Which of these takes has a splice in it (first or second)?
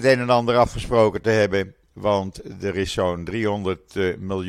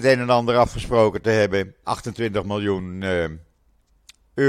second